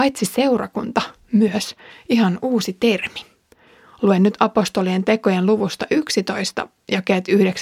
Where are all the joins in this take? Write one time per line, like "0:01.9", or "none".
none